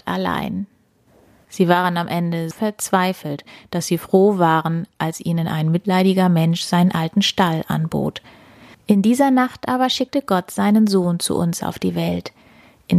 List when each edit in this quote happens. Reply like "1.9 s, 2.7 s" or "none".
1.4 s, 2.5 s, 8.7 s